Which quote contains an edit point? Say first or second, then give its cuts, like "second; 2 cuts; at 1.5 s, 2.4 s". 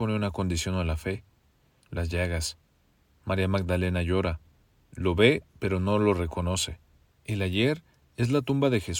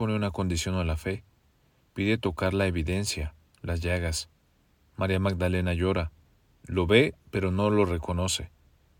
first; 2 cuts; at 1.8 s, 7.1 s